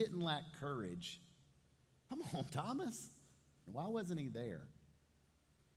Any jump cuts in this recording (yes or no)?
yes